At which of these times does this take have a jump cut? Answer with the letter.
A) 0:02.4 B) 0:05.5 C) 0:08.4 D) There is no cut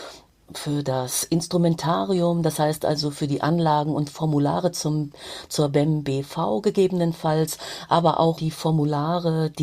C